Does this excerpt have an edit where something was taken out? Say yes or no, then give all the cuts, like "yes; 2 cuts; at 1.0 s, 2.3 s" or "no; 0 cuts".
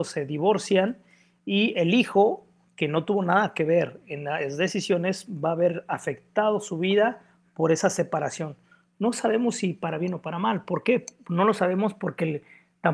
no; 0 cuts